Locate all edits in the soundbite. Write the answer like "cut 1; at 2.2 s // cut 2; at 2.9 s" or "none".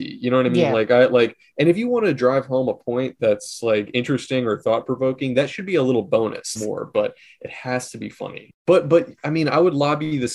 cut 1; at 6.6 s // cut 2; at 8.5 s